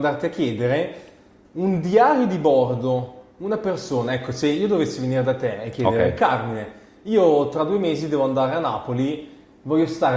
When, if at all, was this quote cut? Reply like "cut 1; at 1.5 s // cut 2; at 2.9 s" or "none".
cut 1; at 1.4 s